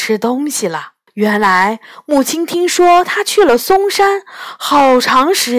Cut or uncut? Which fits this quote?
cut